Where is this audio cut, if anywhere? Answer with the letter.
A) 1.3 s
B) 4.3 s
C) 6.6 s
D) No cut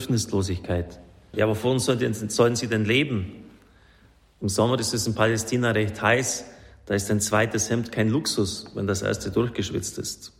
A